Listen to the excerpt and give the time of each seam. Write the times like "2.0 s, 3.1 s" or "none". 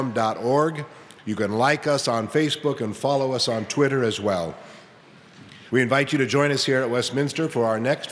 5.7 s